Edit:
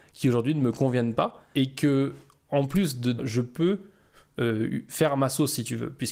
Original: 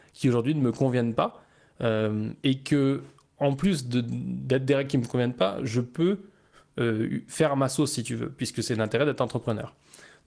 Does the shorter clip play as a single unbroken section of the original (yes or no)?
no